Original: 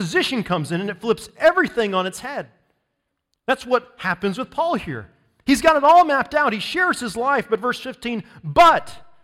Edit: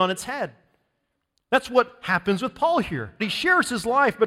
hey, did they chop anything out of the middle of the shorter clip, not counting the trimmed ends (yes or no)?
yes